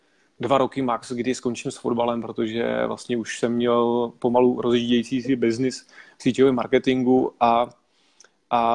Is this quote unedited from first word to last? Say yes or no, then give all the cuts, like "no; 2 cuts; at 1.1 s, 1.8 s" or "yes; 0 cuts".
yes; 0 cuts